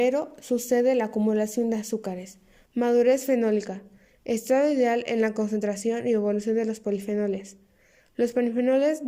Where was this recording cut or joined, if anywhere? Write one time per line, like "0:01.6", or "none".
0:02.7

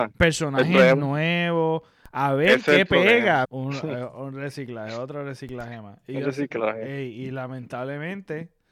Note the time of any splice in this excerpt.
0:03.4

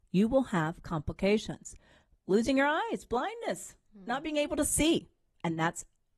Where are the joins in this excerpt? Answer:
0:02.1

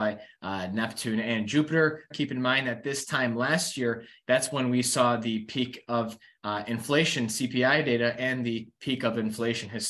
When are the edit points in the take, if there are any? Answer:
0:02.1
0:04.2

